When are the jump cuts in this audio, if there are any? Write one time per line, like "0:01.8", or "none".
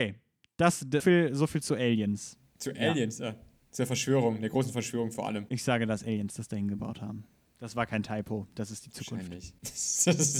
0:01.0